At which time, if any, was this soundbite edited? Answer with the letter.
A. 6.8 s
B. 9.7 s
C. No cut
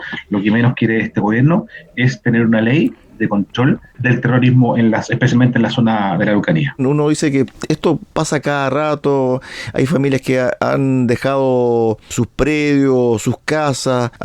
A